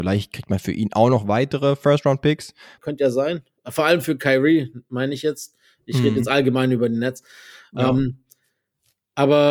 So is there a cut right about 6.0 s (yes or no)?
no